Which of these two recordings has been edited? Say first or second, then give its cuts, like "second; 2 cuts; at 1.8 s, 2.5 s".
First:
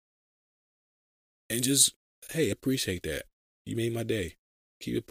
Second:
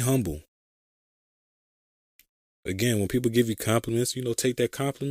first; 1 cut; at 2.5 s